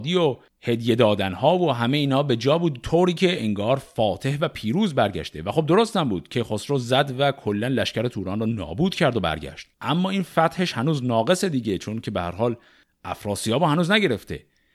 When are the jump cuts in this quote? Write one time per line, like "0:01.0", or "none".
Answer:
0:09.7